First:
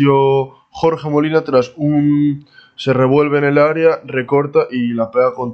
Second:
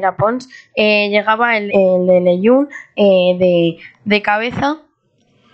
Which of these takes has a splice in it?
second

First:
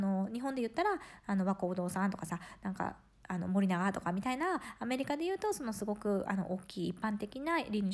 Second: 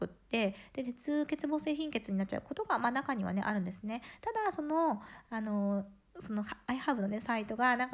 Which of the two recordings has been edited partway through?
second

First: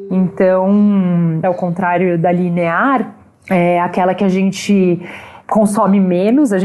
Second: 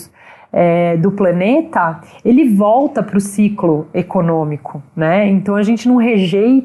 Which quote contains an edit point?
first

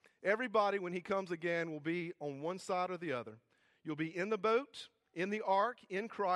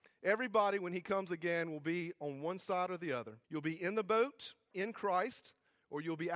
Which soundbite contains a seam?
second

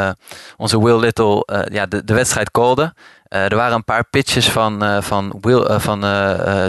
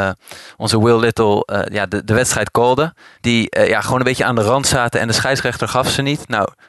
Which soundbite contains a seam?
second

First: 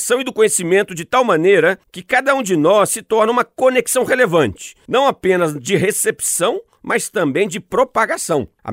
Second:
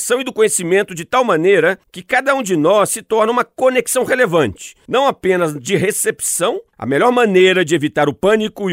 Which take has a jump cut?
second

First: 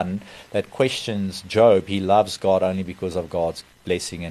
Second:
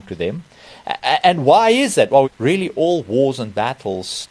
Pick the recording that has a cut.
second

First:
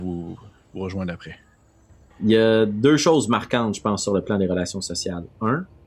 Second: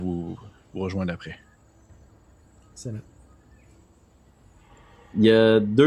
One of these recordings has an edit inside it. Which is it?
first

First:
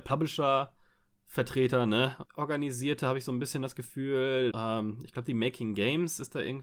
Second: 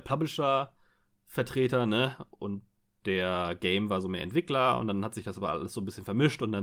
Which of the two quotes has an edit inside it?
first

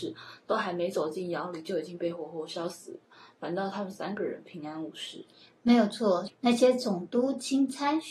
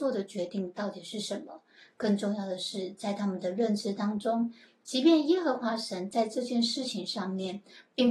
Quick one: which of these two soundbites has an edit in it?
first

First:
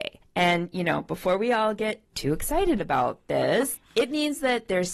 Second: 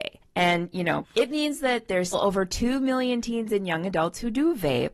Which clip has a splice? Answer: second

